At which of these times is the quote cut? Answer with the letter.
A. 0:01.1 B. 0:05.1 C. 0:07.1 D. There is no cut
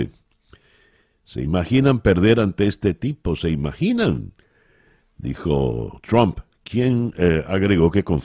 D